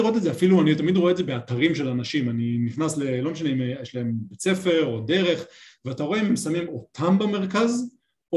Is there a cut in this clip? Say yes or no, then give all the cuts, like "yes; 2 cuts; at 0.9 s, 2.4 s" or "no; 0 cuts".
no; 0 cuts